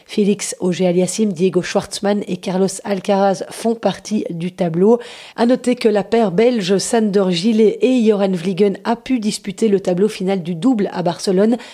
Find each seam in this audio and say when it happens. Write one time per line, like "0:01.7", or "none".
0:05.3